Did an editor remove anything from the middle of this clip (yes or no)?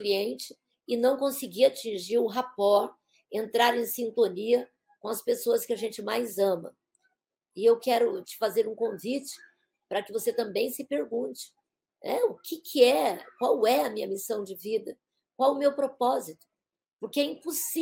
yes